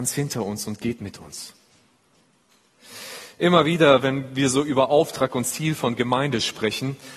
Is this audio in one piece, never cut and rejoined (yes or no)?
yes